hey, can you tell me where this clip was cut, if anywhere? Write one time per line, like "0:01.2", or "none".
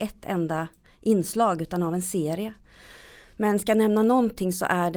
none